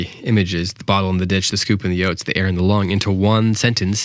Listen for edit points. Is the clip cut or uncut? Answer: uncut